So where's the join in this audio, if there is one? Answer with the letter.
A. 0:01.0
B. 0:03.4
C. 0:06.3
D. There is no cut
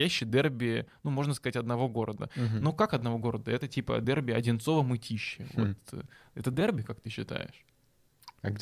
D